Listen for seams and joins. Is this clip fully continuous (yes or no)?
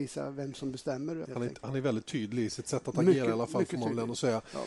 no